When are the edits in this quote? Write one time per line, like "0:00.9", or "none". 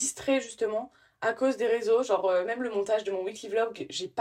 none